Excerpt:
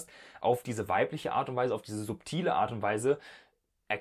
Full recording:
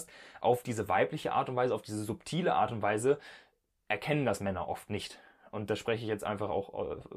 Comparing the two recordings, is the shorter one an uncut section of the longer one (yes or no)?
yes